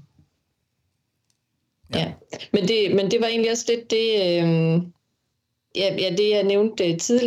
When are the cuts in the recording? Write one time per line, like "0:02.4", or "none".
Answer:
none